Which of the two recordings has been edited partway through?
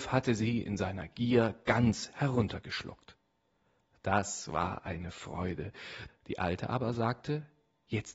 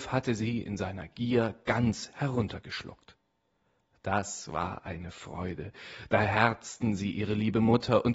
first; 1 cut; at 6.1 s

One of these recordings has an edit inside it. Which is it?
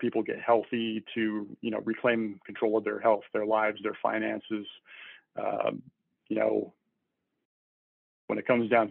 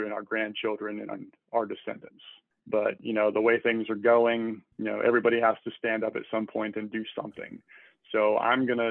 second; 2 cuts; at 2.5 s, 4.7 s

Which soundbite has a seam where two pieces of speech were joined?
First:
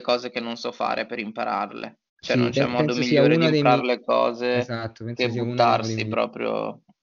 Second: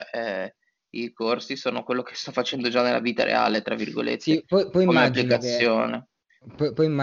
first; 1 cut; at 2.1 s

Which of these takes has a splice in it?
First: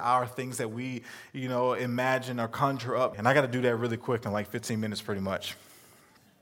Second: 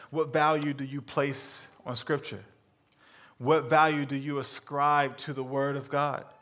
first; 1 cut; at 3.1 s

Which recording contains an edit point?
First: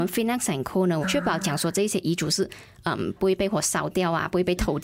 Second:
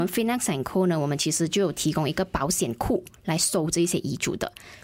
first; 2 cuts; at 1.0 s, 3.2 s

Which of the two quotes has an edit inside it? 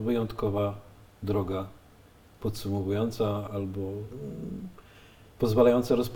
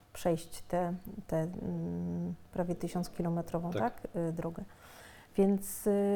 first; 1 cut; at 3.5 s

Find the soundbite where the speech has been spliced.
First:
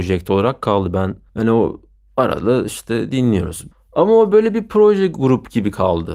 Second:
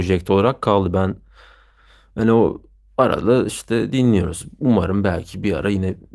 first; 2 cuts; at 1.3 s, 3.7 s

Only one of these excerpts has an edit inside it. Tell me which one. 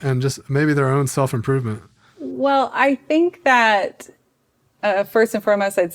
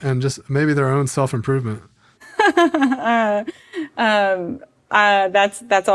second; 1 cut; at 2.1 s

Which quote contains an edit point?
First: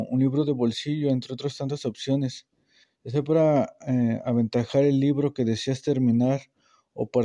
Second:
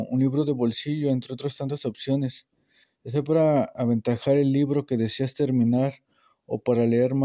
second; 1 cut; at 3.8 s

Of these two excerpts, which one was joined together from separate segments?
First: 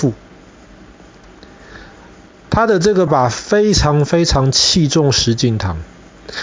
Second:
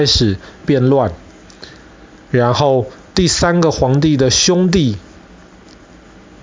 first; 1 cut; at 3.1 s

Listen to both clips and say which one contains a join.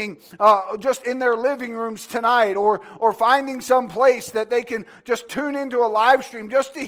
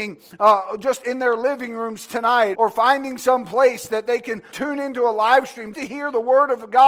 second; 3 cuts; at 2.5 s, 4.5 s, 5.7 s

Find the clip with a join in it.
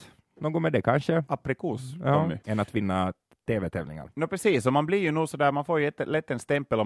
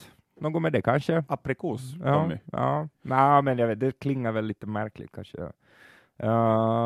first; 1 cut; at 2.4 s

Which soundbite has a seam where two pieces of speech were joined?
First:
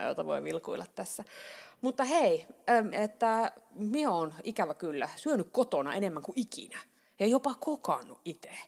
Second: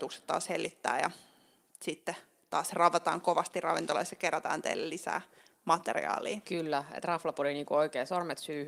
first; 2 cuts; at 2.9 s, 5.2 s

